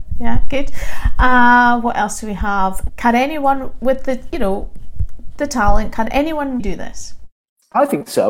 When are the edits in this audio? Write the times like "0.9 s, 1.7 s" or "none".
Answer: 2.9 s, 6.6 s